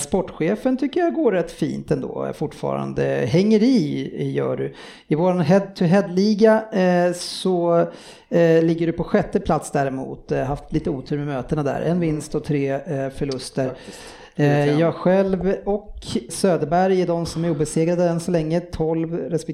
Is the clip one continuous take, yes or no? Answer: no